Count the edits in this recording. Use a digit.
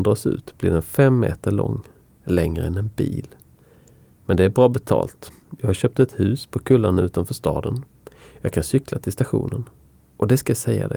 0